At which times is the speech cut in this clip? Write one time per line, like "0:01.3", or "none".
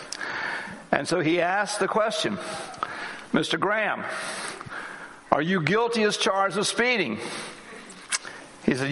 none